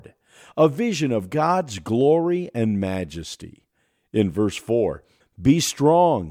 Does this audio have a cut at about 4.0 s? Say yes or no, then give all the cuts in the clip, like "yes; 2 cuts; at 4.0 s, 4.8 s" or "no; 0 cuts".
no; 1 cut; at 5.2 s